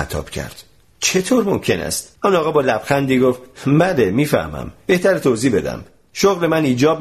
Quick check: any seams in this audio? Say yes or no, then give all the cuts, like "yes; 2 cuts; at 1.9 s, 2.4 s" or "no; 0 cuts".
yes; 1 cut; at 2.1 s